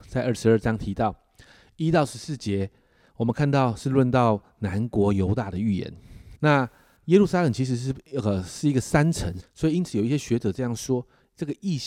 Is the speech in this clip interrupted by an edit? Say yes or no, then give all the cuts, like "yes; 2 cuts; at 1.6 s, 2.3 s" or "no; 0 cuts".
yes; 2 cuts; at 6.3 s, 9.4 s